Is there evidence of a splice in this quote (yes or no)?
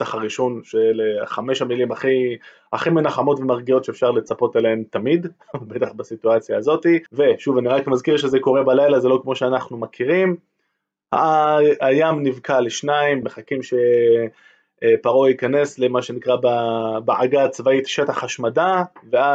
yes